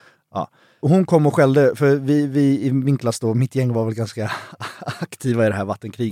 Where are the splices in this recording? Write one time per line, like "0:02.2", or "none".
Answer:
none

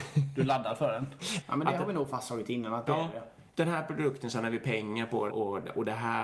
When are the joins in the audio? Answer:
0:01.4
0:05.3

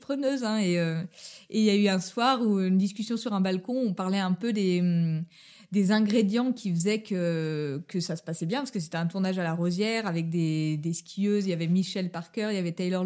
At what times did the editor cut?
none

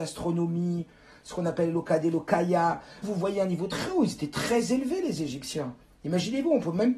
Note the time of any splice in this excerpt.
0:03.0

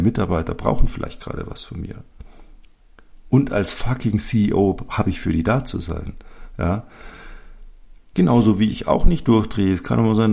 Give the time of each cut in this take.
0:08.1

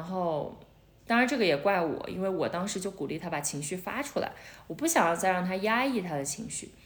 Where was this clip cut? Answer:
0:01.0

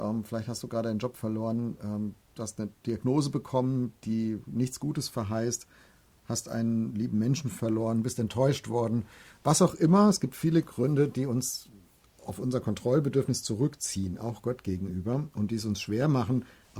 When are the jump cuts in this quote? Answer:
0:02.3

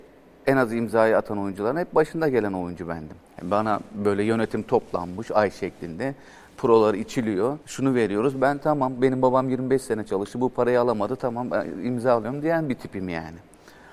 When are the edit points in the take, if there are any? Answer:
0:07.6

